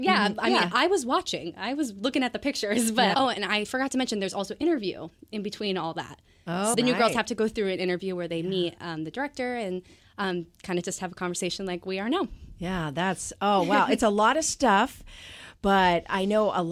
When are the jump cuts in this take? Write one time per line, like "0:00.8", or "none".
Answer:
0:03.1
0:06.7